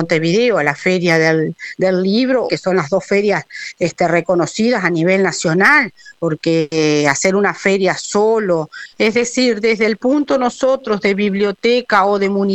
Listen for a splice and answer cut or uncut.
cut